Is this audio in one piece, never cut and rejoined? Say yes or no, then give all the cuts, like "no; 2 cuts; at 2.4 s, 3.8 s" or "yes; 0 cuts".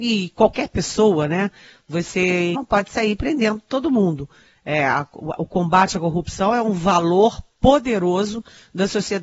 no; 1 cut; at 2.5 s